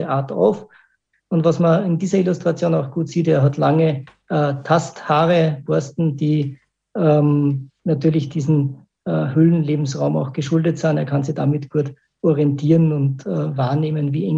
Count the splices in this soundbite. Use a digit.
1